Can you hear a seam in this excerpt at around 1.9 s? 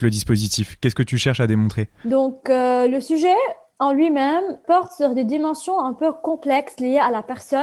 no; 1 cut; at 4.6 s

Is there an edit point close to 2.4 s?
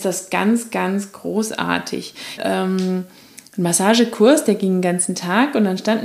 yes; 1 cut; at 2.4 s

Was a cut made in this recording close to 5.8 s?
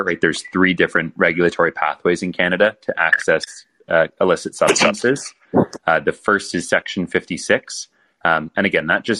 no; 0 cuts

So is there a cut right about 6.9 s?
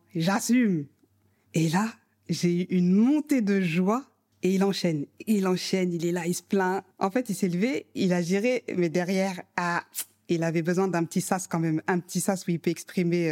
no; 1 cut; at 4.3 s

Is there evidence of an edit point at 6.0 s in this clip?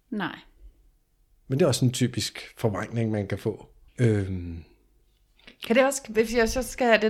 no; 1 cut; at 3.9 s

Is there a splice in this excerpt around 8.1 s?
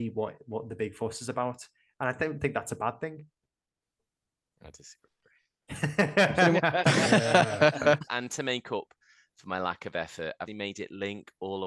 yes; 2 cuts; at 8.1 s, 10.5 s

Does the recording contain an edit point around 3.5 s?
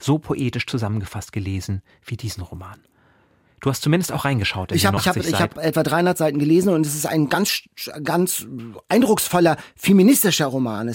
no; 1 cut; at 5.0 s

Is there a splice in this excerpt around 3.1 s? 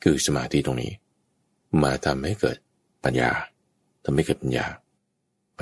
yes; 1 cut; at 3.1 s

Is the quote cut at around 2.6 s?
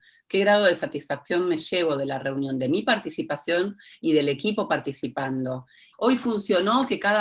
no; 1 cut; at 5.9 s

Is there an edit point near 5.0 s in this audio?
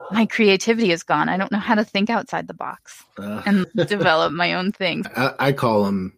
yes; 2 cuts; at 3.6 s, 5.0 s

